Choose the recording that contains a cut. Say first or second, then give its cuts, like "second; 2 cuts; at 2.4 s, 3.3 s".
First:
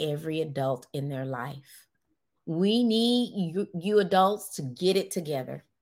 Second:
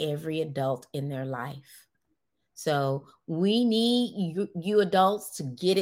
first; 1 cut; at 2.4 s